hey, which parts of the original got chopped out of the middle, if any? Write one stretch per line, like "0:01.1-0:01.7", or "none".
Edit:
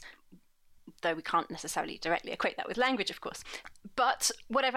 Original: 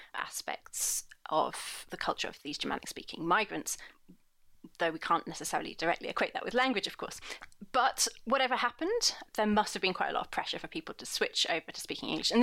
none

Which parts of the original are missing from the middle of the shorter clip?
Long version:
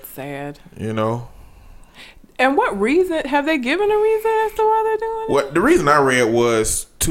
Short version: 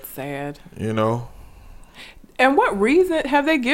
none

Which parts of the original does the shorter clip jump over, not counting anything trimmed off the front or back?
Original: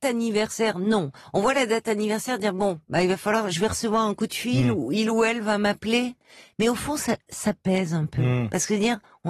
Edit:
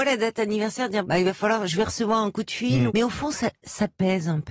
0:02.5-0:02.9
0:04.7-0:06.5

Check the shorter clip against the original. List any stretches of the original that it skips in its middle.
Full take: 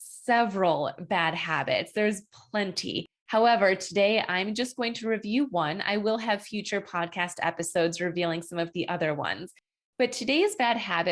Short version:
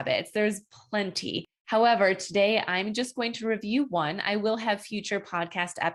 none

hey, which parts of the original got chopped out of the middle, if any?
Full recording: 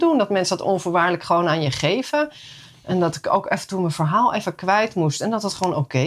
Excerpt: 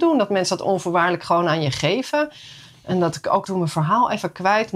0:03.4-0:03.7

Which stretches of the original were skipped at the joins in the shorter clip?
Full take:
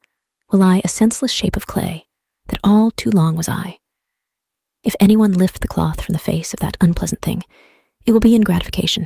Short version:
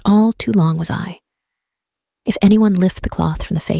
none

